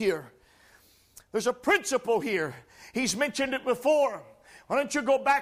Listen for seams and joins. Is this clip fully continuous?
yes; 0 cuts

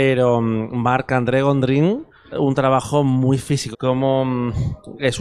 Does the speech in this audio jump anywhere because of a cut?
yes; 2 cuts; at 2.3 s, 3.7 s

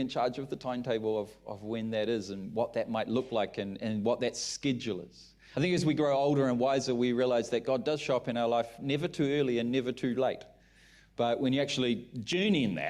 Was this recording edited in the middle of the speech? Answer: no; 0 cuts

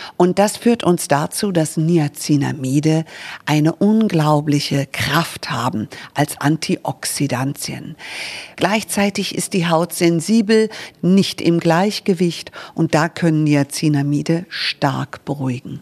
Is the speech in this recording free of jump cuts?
no; 2 cuts; at 8.5 s, 10.9 s

